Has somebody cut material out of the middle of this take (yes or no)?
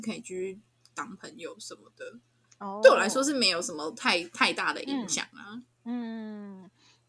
no